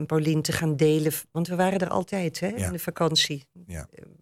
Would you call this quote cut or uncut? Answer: uncut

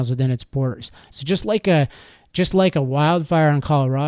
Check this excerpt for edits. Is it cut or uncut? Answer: cut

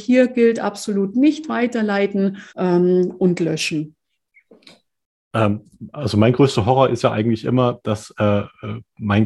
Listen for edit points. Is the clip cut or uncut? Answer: cut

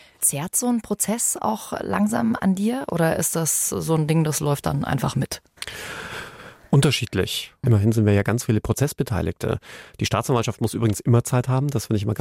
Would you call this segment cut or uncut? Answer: cut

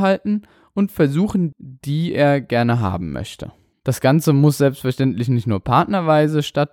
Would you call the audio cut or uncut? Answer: cut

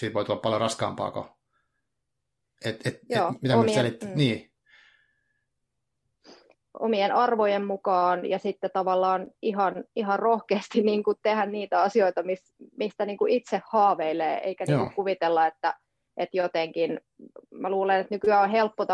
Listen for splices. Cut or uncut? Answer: uncut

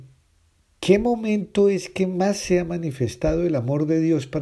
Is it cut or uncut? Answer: uncut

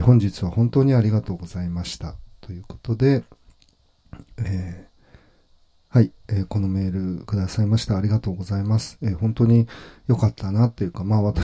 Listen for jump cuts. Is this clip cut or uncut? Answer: uncut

